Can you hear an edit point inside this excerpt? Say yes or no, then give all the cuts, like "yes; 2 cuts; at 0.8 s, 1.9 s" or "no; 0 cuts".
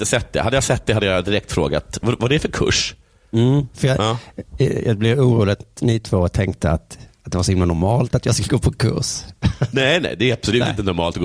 yes; 1 cut; at 3.7 s